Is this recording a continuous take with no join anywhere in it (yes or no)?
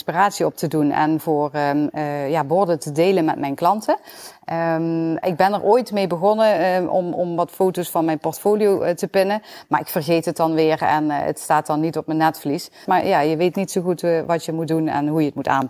no